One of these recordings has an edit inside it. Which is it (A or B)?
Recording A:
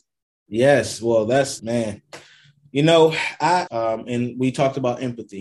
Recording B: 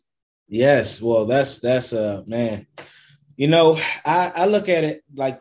A